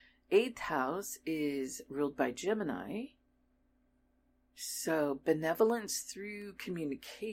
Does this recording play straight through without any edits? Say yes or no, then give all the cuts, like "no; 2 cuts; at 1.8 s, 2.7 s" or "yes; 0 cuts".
yes; 0 cuts